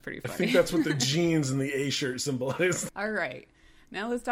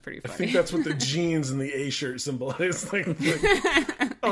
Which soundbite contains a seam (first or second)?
first